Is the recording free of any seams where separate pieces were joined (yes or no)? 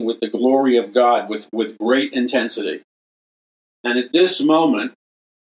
yes